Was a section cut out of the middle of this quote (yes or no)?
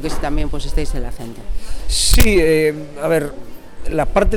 no